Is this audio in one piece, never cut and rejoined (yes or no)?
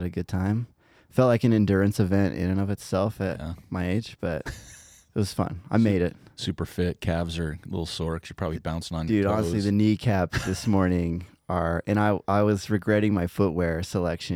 yes